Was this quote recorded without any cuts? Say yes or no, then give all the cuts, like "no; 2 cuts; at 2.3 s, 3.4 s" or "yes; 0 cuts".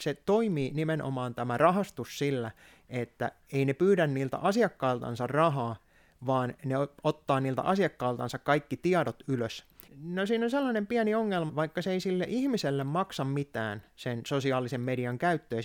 no; 2 cuts; at 9.9 s, 11.5 s